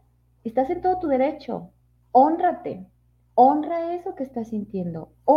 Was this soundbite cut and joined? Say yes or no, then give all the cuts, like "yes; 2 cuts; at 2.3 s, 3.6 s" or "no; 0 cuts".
no; 0 cuts